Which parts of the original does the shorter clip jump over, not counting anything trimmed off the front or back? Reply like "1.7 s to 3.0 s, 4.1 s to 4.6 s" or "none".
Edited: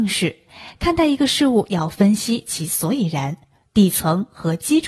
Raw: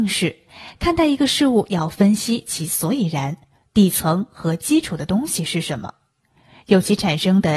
none

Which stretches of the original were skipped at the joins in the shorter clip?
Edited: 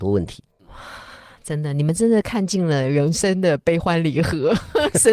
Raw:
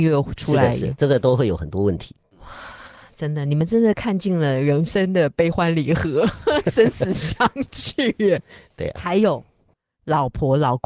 none

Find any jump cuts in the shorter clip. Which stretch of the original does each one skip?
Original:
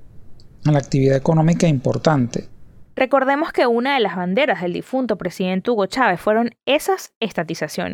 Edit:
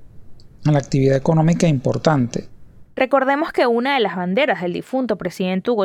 none

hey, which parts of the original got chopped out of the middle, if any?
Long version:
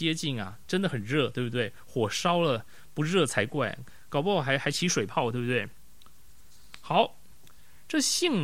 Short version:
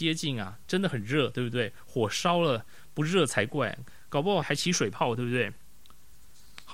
4.4 s to 4.6 s

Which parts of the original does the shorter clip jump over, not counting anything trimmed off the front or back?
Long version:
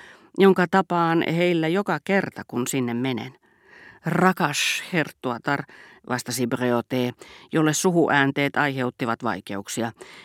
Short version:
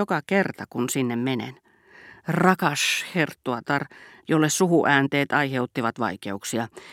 6.0 s to 7.5 s

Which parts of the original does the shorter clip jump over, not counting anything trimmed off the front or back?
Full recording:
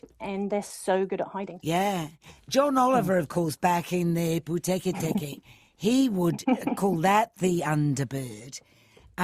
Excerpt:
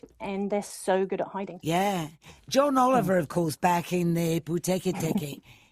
none

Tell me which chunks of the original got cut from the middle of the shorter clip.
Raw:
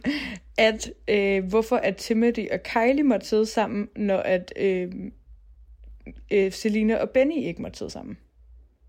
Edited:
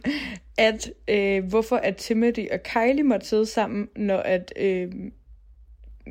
none

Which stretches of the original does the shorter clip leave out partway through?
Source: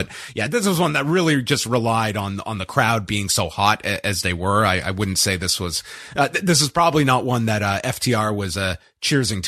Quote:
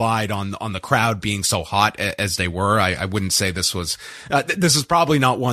none

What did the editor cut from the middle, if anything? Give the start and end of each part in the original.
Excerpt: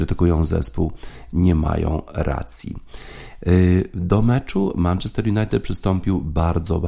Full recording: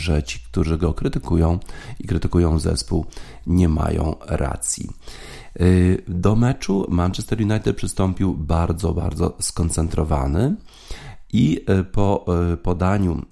none

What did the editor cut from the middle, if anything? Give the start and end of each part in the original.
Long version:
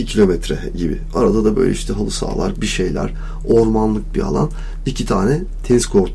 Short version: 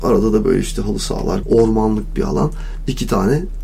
2.5 s to 3.4 s

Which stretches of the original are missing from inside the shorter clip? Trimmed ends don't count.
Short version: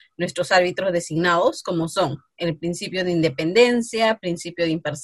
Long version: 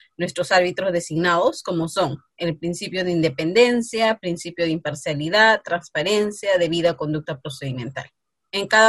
none

